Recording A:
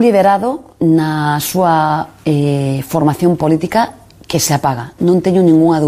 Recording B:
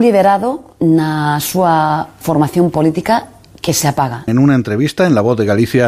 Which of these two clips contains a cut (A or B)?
B